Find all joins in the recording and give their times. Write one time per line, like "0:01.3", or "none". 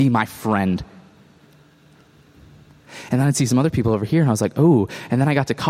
0:03.1

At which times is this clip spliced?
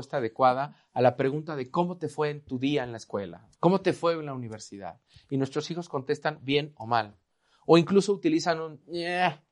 0:03.5

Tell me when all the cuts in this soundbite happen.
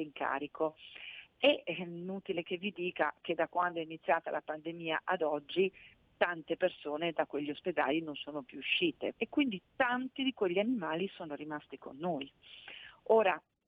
0:09.1

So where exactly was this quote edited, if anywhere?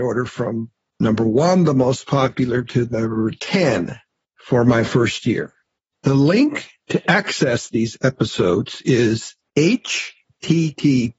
none

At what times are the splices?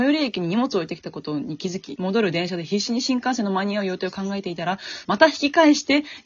0:02.0
0:05.0

